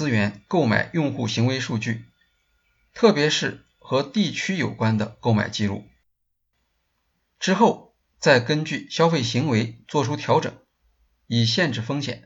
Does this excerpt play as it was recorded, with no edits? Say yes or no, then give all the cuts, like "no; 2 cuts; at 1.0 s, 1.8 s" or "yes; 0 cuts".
no; 1 cut; at 7.2 s